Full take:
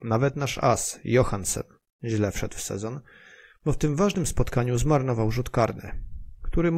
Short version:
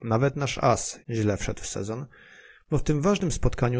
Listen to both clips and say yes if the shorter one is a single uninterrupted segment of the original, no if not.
no